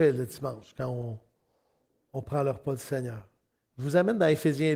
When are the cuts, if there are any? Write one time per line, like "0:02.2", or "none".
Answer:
0:03.7